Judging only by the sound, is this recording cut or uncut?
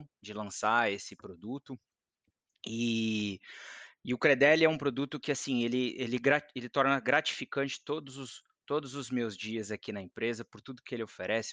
uncut